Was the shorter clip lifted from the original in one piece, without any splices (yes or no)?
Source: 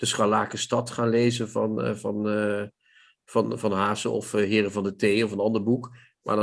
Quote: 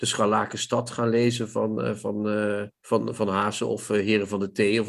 no